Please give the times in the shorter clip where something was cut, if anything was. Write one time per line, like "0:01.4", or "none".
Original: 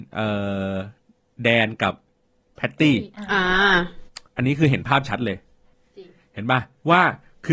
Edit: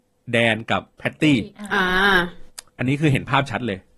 0:00.9